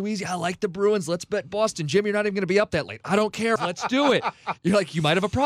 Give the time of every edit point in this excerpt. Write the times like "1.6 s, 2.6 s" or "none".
3.6 s

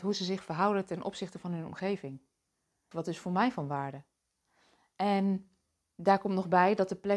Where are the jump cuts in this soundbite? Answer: 2.9 s

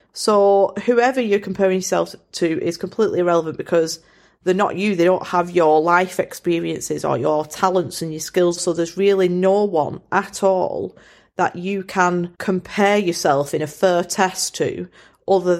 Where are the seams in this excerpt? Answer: 8.6 s, 12.3 s

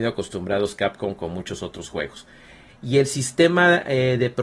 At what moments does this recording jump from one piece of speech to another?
2.7 s

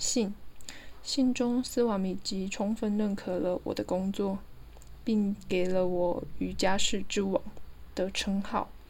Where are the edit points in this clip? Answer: none

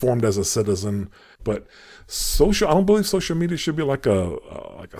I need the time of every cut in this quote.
1.4 s

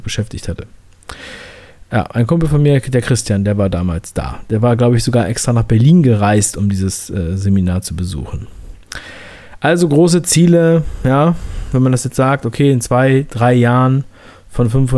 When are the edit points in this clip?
none

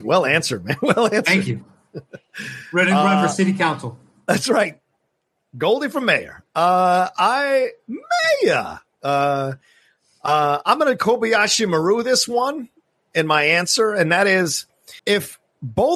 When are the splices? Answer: 15.0 s

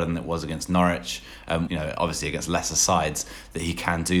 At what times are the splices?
1.7 s

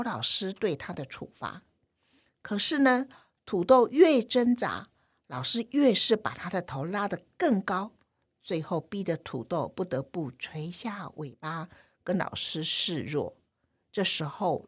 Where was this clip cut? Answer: none

